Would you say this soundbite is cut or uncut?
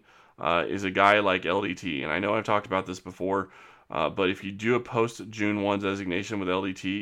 uncut